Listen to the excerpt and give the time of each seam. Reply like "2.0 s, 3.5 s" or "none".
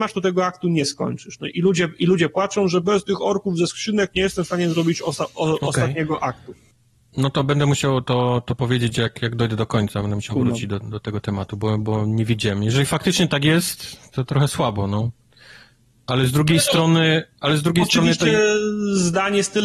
none